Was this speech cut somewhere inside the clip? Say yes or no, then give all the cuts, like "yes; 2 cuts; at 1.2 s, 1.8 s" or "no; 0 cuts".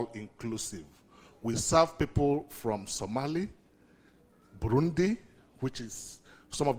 no; 0 cuts